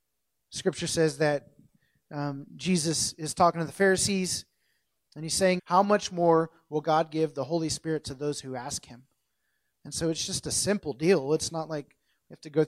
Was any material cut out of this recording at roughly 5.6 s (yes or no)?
yes